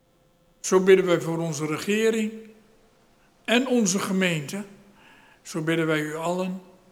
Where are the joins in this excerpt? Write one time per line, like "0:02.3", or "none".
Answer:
0:05.3